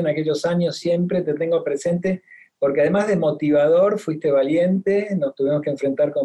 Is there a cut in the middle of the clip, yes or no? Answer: no